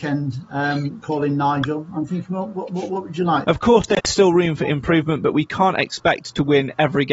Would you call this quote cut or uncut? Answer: cut